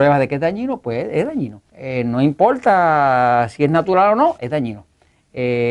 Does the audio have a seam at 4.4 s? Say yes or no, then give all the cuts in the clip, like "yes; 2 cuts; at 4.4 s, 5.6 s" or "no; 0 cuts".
yes; 2 cuts; at 1.7 s, 4.4 s